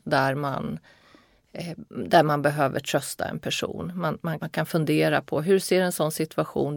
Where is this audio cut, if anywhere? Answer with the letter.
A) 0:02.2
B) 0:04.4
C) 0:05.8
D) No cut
B